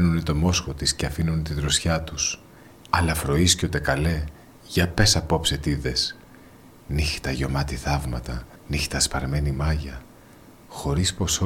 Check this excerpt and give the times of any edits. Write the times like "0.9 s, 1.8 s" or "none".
2.8 s, 8.6 s